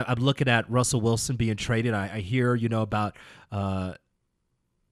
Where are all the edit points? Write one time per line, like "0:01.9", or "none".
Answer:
none